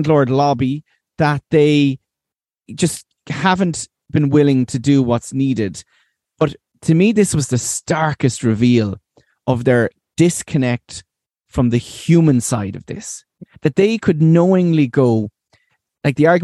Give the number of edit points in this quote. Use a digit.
0